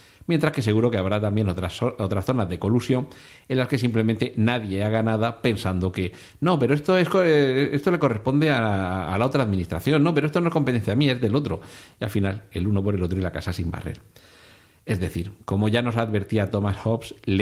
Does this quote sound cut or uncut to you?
uncut